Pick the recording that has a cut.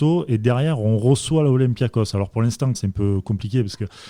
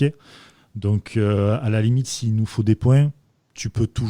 first; 1 cut; at 2.7 s

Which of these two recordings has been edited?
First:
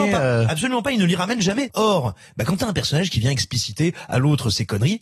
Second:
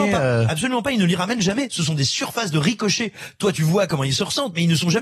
first; 1 cut; at 1.7 s

